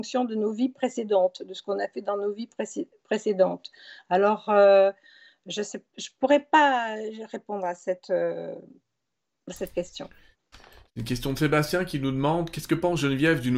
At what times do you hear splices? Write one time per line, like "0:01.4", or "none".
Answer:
none